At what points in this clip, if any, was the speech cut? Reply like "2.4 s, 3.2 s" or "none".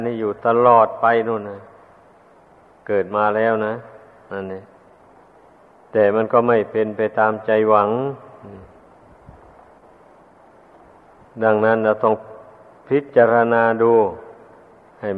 none

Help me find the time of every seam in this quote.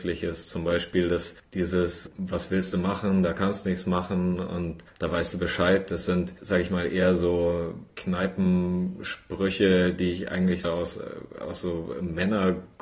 10.6 s

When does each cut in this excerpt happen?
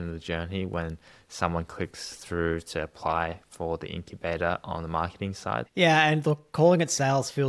5.7 s

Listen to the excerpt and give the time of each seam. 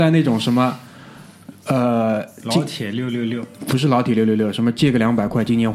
none

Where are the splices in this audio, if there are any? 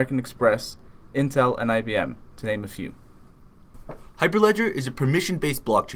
none

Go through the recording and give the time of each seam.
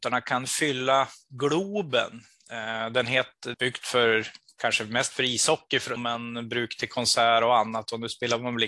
3.5 s, 6.0 s

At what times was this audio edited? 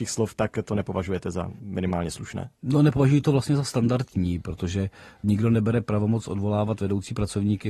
none

